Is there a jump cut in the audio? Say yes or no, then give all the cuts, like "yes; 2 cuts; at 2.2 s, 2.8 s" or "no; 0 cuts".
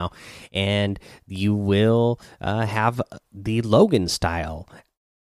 no; 0 cuts